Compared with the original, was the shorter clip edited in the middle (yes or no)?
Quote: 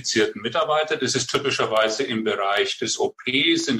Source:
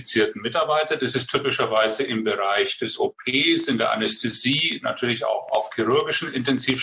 no